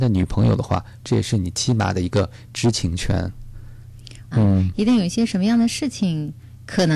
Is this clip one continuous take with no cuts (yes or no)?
no